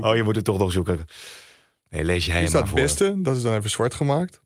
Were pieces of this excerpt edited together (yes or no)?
no